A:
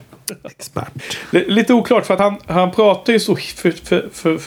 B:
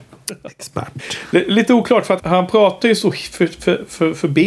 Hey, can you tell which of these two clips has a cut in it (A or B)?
B